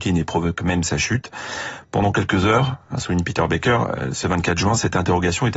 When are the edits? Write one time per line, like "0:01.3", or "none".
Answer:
none